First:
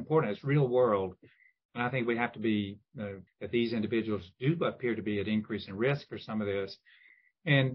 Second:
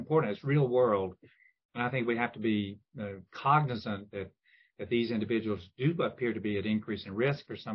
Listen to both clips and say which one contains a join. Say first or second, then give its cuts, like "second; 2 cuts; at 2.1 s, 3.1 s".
first; 1 cut; at 3.3 s